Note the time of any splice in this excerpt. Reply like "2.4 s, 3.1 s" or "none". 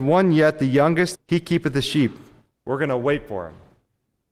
1.1 s, 2.5 s